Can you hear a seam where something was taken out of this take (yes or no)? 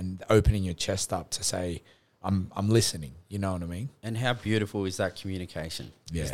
yes